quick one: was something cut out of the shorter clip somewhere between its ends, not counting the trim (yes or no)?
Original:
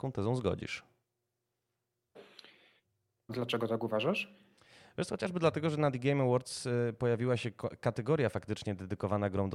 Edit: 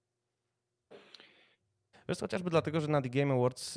yes